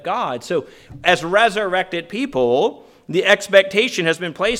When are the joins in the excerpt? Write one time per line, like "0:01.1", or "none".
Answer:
none